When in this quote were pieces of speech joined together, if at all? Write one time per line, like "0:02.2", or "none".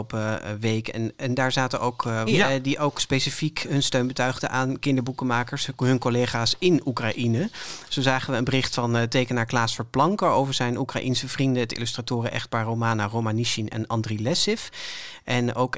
0:02.3